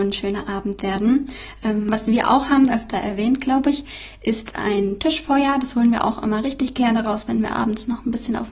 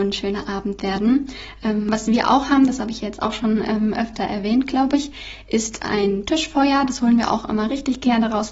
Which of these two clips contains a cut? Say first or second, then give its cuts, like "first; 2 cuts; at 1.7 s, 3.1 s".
first; 1 cut; at 2.7 s